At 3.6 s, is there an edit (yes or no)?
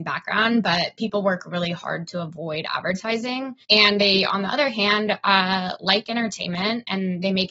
yes